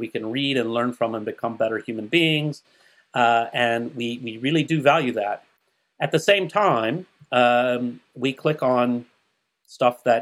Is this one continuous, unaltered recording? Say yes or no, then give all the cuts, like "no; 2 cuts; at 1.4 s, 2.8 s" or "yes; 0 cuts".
yes; 0 cuts